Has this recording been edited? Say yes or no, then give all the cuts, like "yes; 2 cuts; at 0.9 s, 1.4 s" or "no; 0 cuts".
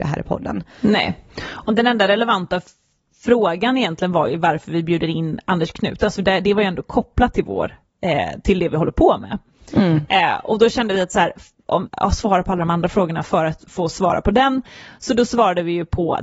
yes; 1 cut; at 11.9 s